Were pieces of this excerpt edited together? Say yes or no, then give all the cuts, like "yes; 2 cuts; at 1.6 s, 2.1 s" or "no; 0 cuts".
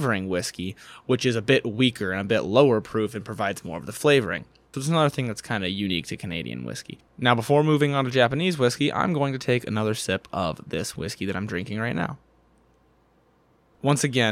yes; 1 cut; at 4.7 s